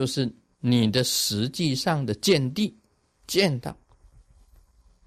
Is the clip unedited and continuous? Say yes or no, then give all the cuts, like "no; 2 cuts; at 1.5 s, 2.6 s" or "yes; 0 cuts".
yes; 0 cuts